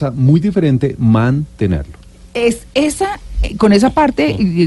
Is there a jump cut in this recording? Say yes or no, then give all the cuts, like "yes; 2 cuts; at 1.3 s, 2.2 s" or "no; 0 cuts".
no; 0 cuts